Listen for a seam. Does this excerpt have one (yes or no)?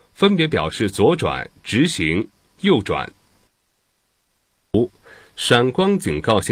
no